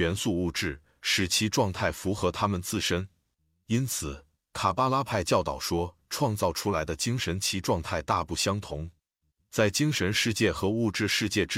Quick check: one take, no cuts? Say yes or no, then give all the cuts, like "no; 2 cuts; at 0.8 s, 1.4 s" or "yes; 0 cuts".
yes; 0 cuts